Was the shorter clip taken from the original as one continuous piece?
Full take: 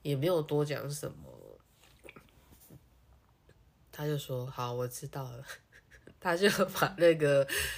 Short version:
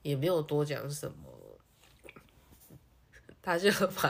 no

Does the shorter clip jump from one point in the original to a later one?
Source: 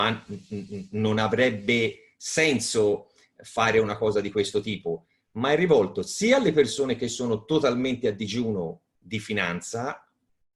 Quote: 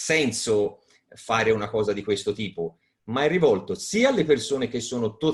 no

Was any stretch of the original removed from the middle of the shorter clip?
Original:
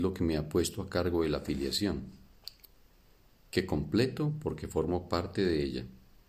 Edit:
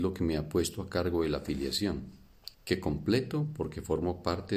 yes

